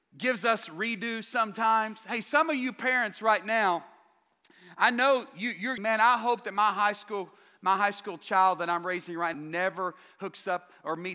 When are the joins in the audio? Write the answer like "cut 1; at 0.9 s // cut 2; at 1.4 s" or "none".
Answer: cut 1; at 5.8 s // cut 2; at 9.3 s